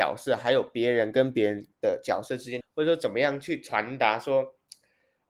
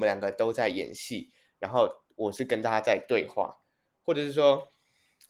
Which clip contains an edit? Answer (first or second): first